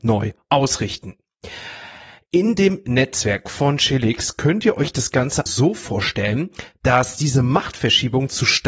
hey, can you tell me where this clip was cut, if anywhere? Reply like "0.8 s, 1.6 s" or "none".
5.5 s